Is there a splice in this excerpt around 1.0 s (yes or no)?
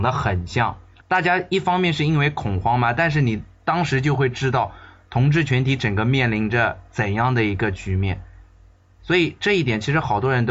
yes